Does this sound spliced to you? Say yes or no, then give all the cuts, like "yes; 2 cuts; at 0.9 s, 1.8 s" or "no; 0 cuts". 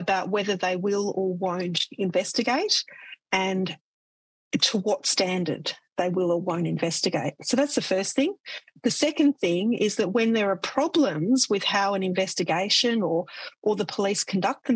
no; 0 cuts